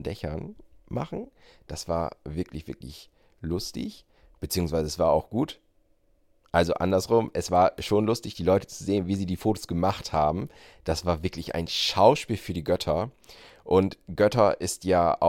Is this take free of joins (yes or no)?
yes